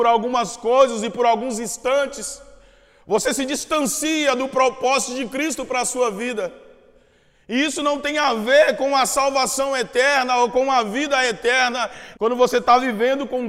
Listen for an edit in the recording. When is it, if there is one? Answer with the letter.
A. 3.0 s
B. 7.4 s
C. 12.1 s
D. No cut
C